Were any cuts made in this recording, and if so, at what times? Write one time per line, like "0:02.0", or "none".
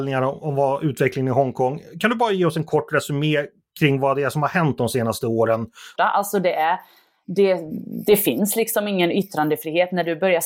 0:06.0